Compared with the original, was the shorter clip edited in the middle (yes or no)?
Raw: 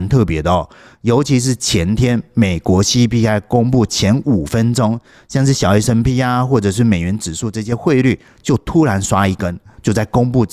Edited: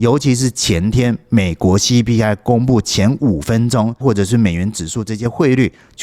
yes